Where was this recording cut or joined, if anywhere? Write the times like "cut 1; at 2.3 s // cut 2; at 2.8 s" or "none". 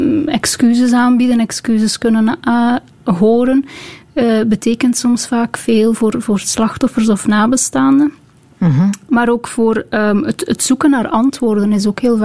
none